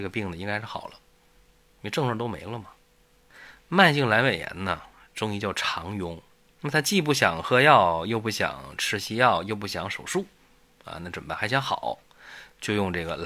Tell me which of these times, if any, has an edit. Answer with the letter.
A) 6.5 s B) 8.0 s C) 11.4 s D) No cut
A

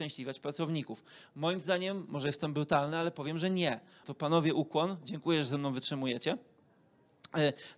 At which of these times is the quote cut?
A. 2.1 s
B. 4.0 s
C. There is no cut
B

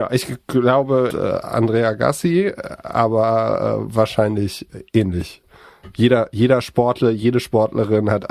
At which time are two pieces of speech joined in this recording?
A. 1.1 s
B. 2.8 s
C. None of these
A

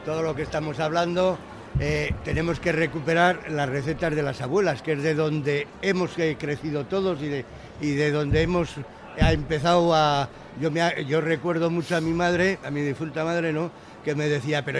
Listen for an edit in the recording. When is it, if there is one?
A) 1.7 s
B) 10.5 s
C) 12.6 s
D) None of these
D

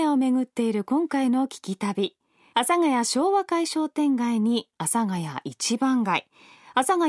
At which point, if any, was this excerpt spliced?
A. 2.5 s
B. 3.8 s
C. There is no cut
A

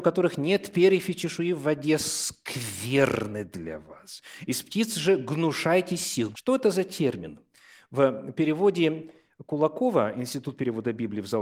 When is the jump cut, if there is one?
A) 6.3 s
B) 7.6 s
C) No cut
A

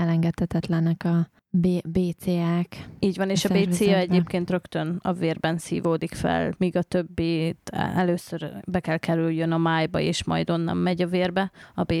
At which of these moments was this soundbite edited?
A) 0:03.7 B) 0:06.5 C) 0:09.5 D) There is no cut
B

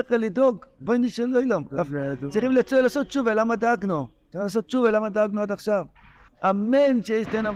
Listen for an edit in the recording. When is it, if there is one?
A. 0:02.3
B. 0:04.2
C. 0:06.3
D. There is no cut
C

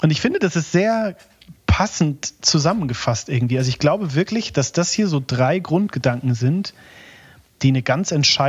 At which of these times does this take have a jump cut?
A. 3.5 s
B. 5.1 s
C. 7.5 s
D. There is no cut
D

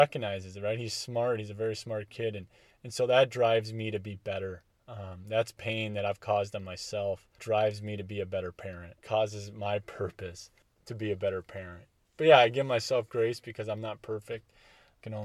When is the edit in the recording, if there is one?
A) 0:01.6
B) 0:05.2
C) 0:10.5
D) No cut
D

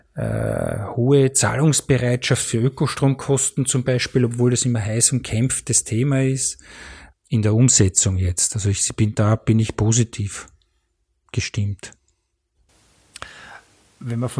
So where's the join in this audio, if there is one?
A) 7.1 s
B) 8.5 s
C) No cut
A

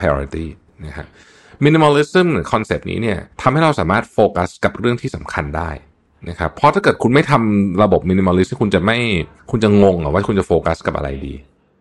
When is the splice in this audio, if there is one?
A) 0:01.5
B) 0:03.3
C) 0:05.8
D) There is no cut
B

